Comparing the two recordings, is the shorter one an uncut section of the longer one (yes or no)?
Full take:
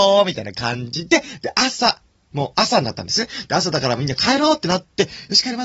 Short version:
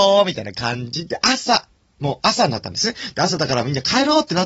no